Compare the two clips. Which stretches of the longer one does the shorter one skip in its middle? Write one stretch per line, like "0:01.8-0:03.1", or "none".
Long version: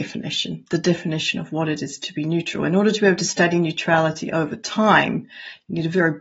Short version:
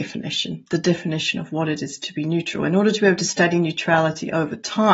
none